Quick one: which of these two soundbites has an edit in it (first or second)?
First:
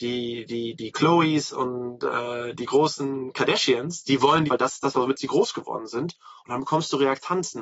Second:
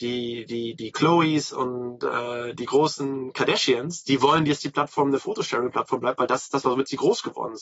first